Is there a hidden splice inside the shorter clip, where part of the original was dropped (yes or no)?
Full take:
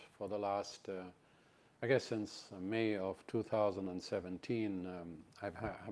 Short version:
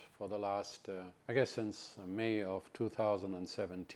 yes